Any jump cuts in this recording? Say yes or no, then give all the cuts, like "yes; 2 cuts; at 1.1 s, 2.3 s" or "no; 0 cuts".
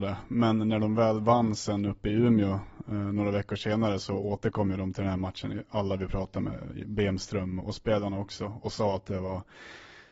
yes; 1 cut; at 7.6 s